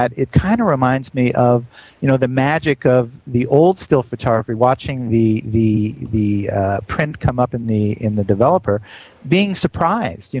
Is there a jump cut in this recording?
no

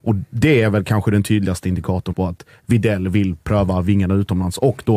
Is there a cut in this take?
yes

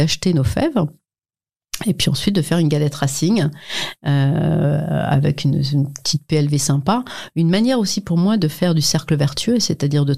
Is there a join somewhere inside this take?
no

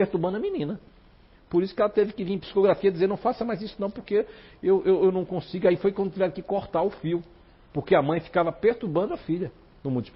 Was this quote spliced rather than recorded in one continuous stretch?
no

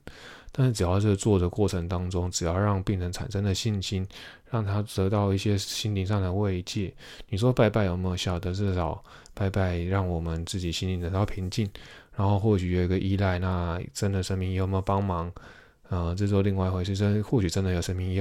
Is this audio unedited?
yes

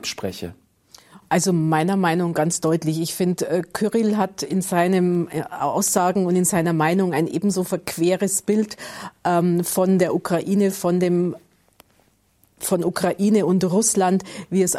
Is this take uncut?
yes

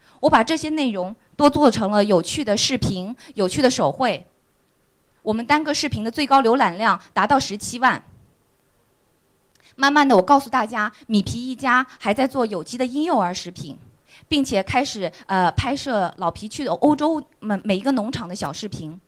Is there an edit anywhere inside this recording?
no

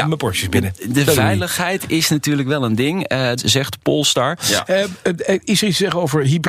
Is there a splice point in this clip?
yes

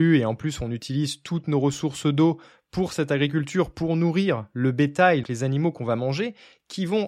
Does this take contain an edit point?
yes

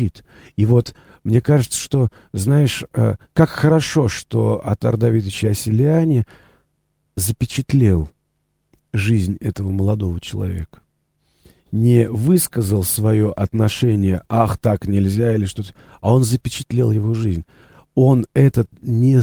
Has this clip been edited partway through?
no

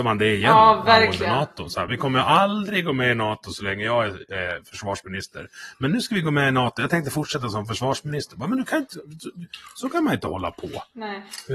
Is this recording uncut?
yes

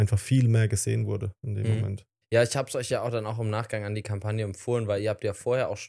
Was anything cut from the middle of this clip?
no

